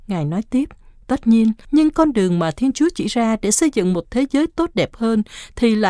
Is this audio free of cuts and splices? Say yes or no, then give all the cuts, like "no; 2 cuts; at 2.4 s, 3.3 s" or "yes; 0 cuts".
no; 1 cut; at 1.6 s